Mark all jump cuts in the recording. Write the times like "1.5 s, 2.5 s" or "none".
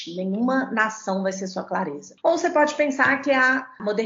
2.2 s